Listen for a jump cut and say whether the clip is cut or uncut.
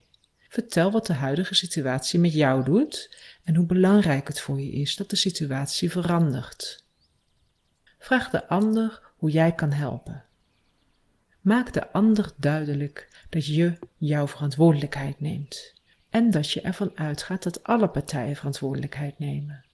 cut